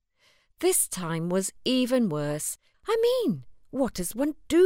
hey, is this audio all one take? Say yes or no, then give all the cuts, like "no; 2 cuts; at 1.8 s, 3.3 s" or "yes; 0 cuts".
no; 1 cut; at 2.7 s